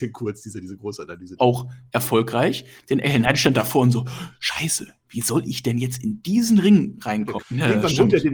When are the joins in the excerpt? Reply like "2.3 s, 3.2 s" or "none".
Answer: 1.4 s, 7.4 s